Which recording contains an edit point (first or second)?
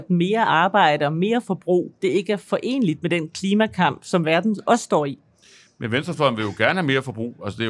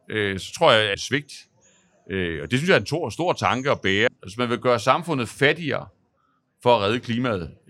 second